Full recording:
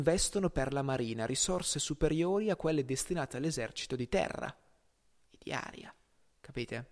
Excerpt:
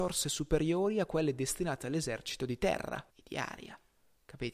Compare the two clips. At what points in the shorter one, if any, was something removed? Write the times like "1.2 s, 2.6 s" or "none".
3.1 s